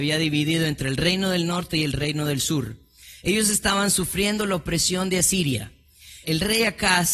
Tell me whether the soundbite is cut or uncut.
cut